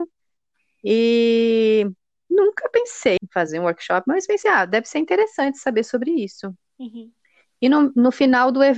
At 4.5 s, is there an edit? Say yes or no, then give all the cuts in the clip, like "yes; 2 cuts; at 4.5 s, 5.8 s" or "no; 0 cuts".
no; 2 cuts; at 3.2 s, 6.7 s